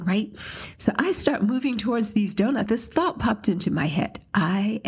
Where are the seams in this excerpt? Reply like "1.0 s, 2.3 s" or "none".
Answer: 2.7 s